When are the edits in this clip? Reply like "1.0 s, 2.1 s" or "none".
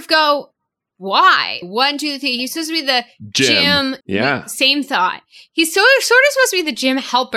1.6 s, 4.0 s

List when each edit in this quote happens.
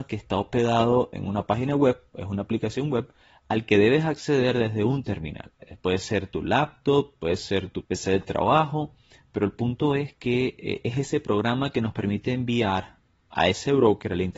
7.8 s

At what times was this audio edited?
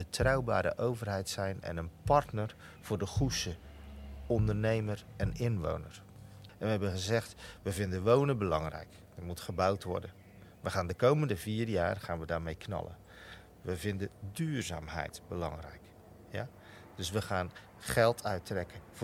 6.5 s

